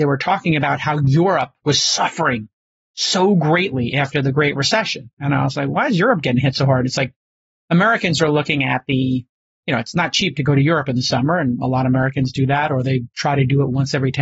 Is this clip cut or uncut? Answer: uncut